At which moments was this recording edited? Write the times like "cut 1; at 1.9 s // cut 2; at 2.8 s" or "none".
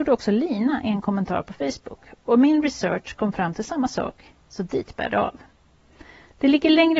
none